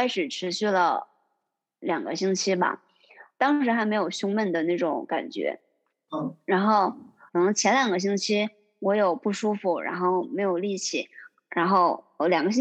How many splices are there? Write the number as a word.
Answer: one